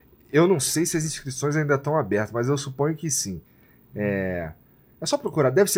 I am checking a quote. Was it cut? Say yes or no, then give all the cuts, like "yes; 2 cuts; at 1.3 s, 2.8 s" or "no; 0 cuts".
no; 0 cuts